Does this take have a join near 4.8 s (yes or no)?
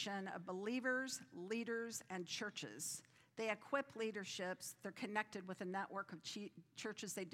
no